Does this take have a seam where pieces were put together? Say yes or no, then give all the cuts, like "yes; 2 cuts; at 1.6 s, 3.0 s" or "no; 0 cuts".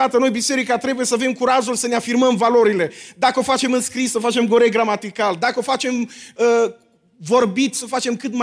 no; 0 cuts